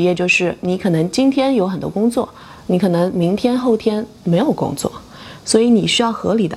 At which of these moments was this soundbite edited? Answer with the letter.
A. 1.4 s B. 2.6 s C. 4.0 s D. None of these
D